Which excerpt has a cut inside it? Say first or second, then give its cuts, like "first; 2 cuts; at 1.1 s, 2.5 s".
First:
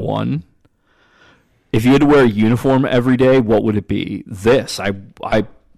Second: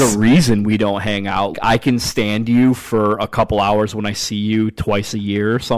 second; 1 cut; at 1.5 s